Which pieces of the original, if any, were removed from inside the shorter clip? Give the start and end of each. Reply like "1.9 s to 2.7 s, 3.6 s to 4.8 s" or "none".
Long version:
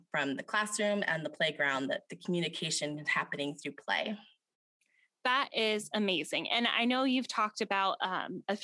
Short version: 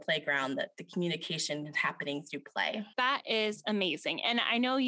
4.2 s to 5.2 s